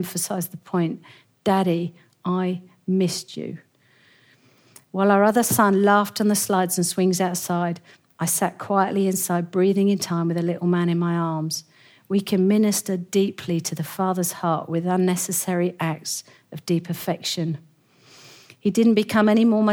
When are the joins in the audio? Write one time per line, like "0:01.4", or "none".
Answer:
none